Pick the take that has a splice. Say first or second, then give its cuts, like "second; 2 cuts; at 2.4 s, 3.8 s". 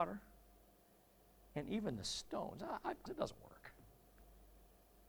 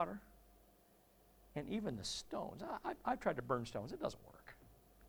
first; 1 cut; at 3.1 s